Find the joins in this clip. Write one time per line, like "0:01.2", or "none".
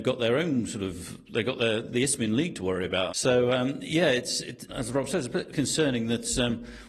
0:03.1
0:04.7

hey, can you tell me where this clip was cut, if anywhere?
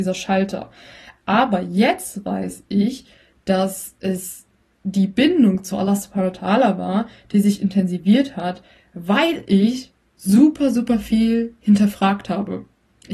none

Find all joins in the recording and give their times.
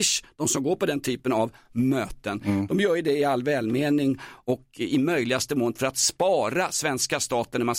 none

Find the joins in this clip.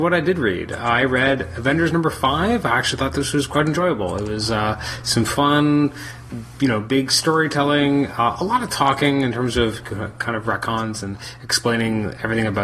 none

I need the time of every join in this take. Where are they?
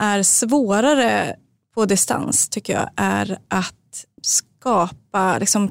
0:04.2

